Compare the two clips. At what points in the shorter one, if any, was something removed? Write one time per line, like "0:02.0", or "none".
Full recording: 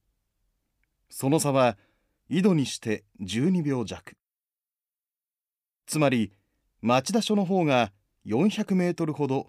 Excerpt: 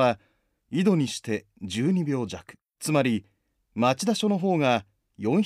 0:02.7